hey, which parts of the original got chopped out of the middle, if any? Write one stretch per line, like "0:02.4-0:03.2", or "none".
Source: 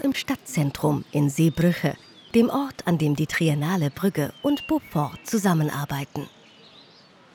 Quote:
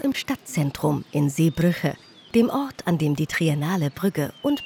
none